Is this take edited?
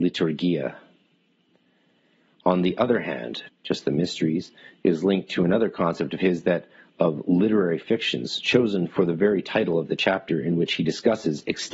yes; 1 cut; at 3.5 s

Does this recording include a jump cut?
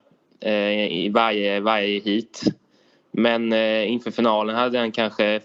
no; 0 cuts

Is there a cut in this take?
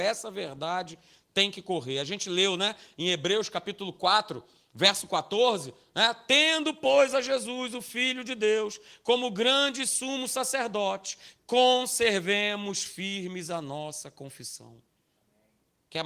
yes; 1 cut; at 11.4 s

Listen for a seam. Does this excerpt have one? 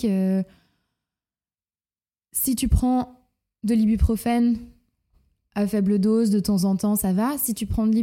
no; 0 cuts

